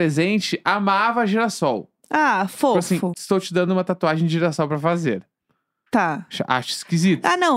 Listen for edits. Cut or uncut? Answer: cut